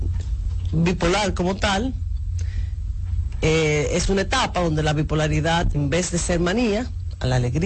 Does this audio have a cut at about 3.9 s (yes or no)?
no